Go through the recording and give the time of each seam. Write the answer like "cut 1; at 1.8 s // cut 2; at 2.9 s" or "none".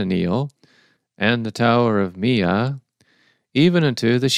none